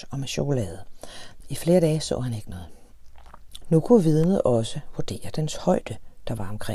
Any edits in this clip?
yes; 2 cuts; at 1.4 s, 3.6 s

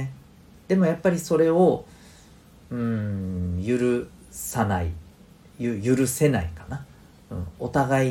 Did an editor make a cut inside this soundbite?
no; 0 cuts

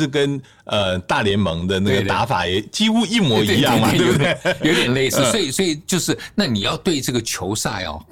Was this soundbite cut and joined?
no; 0 cuts

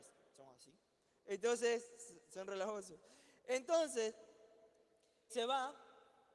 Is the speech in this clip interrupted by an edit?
yes; 1 cut; at 5.3 s

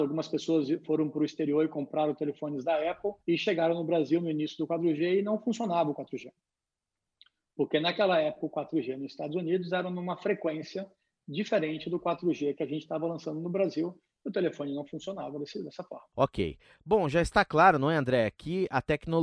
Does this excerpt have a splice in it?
yes; 1 cut; at 3.2 s

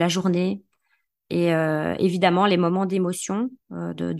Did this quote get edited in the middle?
no; 0 cuts

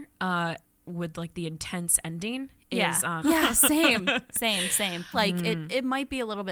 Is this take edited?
yes; 2 cuts; at 3.2 s, 5.1 s

